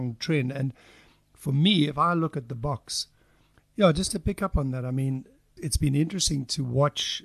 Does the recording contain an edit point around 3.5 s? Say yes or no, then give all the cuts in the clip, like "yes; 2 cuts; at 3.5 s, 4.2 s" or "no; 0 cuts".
yes; 2 cuts; at 3.5 s, 5.6 s